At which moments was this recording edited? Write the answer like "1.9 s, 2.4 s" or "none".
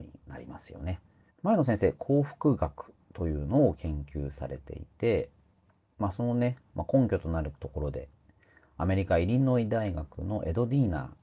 1.3 s